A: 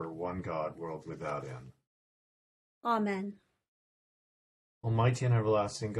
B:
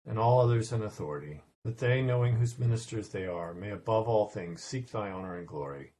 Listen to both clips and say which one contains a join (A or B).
B